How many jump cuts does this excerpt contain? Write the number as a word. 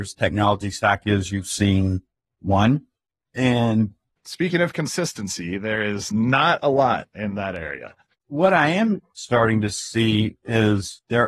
one